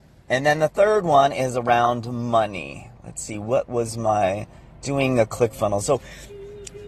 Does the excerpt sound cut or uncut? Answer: uncut